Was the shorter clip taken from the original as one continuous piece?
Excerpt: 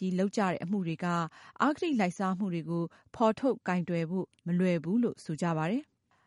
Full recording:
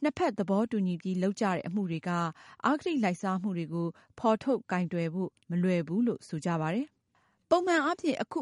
yes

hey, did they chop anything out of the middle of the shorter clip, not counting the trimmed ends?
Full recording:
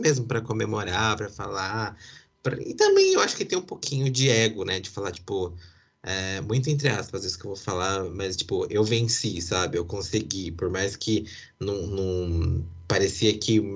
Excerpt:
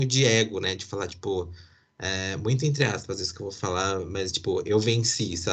no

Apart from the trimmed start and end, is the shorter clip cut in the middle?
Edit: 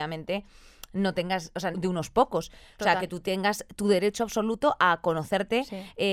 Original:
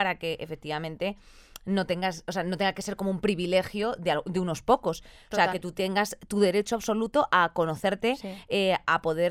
yes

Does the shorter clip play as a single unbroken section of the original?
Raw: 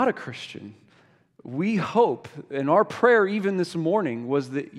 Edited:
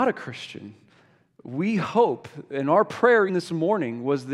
no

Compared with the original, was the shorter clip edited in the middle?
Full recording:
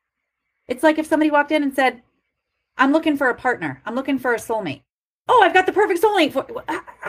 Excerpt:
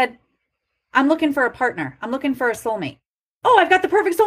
no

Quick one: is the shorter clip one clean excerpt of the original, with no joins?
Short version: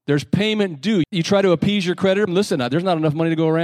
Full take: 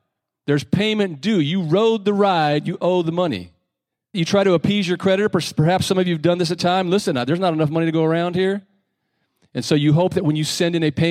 no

